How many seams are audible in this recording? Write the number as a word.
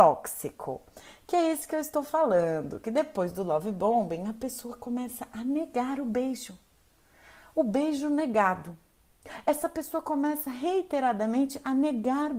zero